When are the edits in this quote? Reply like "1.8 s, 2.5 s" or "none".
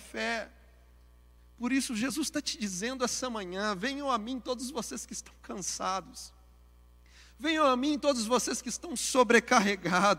none